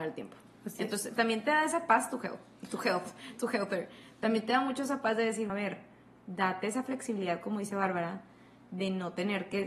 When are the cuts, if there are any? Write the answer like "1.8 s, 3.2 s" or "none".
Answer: 5.5 s